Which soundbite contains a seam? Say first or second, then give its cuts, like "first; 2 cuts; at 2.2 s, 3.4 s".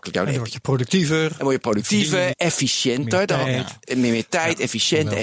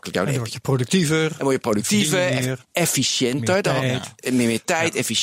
first; 1 cut; at 2.3 s